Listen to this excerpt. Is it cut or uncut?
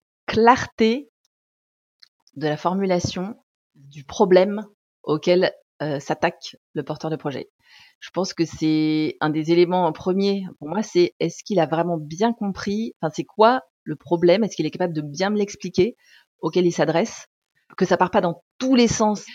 uncut